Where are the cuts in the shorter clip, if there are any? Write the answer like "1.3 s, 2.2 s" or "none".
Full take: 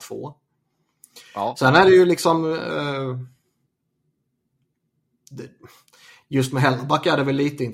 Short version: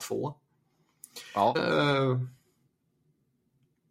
1.5 s